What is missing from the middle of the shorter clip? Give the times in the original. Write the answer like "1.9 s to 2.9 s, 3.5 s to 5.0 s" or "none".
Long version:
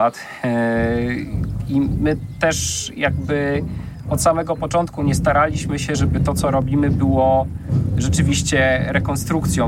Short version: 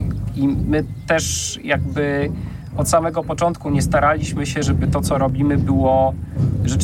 none